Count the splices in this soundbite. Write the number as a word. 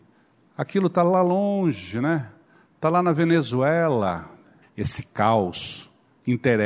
one